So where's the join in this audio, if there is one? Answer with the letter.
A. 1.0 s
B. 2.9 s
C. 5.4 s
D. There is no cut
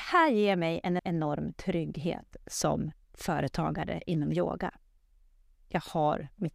A